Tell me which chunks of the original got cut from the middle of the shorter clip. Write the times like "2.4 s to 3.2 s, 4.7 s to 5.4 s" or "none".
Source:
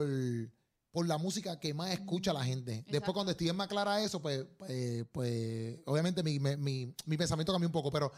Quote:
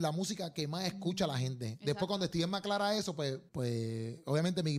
4.5 s to 5.1 s